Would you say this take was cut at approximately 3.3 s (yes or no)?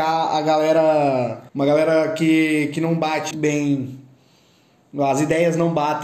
yes